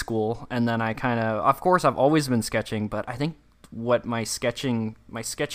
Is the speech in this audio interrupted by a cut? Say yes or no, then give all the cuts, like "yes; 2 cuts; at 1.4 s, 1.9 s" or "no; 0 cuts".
no; 0 cuts